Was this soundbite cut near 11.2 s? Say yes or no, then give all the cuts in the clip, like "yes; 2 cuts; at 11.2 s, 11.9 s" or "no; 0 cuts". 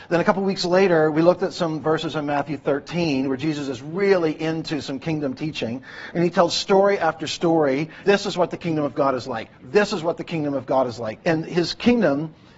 yes; 2 cuts; at 8.0 s, 11.2 s